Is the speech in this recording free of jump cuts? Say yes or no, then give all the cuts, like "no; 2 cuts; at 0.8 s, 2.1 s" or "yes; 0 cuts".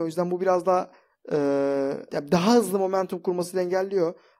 no; 1 cut; at 2.1 s